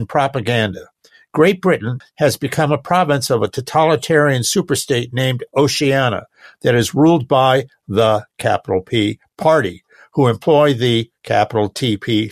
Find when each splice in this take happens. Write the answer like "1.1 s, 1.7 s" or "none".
2.0 s